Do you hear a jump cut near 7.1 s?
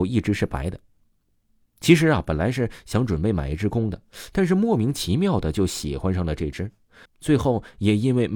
yes; 1 cut; at 7.1 s

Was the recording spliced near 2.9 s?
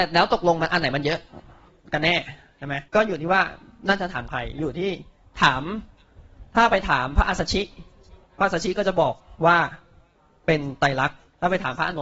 yes; 1 cut; at 2.9 s

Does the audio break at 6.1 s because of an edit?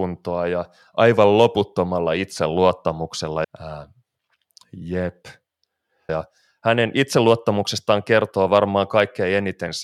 yes; 2 cuts; at 3.4 s, 6.1 s

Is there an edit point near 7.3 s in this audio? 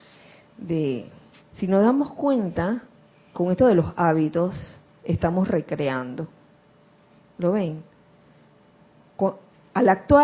no; 1 cut; at 1.4 s

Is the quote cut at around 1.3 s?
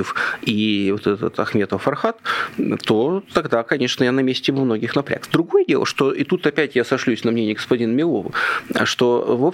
yes; 1 cut; at 1.3 s

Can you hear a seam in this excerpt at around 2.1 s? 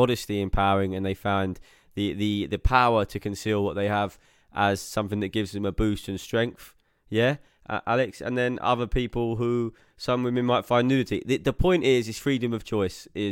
no; 0 cuts

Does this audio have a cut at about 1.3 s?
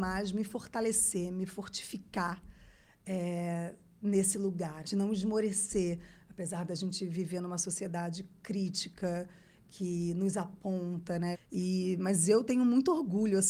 no; 2 cuts; at 4.8 s, 11.3 s

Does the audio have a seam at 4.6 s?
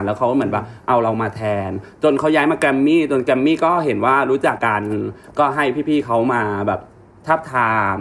yes; 1 cut; at 4.6 s

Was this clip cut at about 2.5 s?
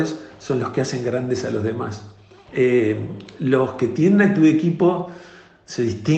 yes; 1 cut; at 2.5 s

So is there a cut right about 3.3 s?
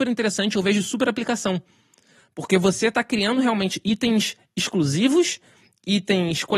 no; 0 cuts

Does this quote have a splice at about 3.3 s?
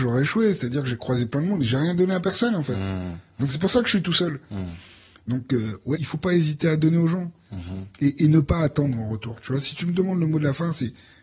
no; 1 cut; at 6.0 s

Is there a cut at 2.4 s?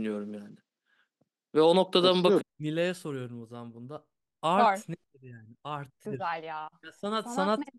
yes; 2 cuts; at 2.4 s, 6.0 s

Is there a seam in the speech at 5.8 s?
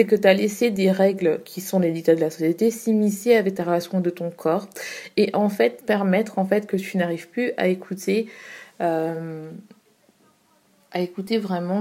yes; 1 cut; at 5.8 s

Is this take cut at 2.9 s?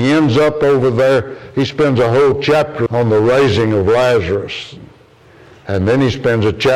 yes; 1 cut; at 2.9 s

